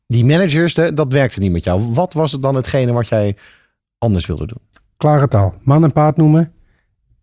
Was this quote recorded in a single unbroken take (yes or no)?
yes